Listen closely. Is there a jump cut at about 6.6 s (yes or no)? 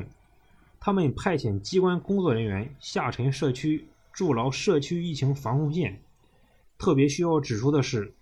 yes